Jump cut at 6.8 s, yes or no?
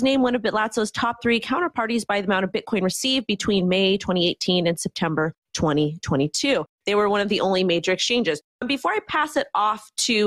no